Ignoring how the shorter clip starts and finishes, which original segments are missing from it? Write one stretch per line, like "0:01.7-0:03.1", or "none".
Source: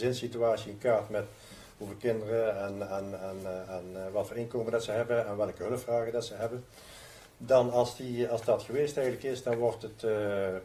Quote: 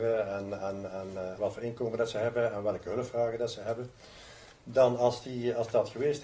0:03.7-0:04.1